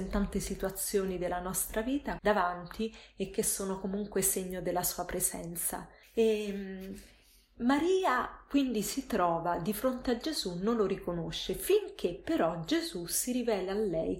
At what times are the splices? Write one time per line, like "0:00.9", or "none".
0:02.2